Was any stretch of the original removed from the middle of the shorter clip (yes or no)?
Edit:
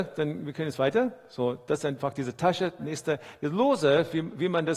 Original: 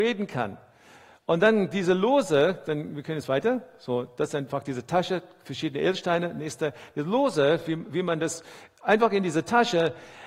yes